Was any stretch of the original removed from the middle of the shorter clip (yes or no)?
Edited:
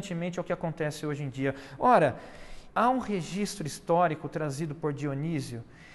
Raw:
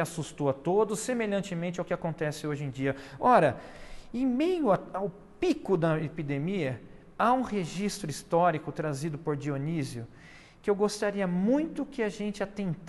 yes